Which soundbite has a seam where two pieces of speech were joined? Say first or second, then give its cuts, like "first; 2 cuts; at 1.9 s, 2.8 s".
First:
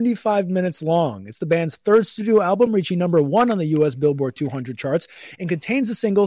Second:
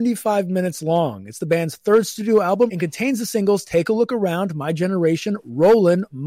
second; 1 cut; at 2.7 s